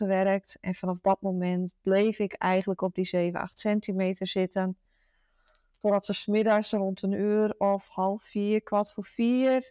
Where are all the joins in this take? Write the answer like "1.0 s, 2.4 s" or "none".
none